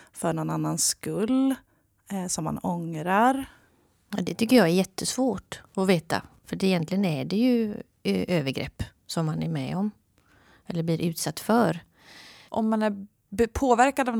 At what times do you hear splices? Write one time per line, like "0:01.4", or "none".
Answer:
0:09.0
0:12.5